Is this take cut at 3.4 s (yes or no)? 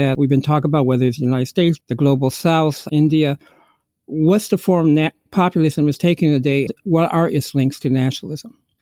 no